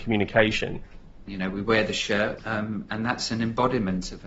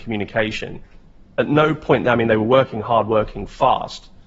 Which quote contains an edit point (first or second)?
first